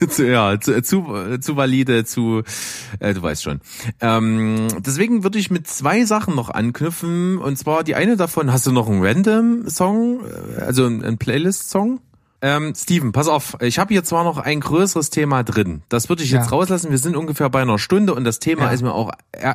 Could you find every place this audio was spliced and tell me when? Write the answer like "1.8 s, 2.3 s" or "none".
12.4 s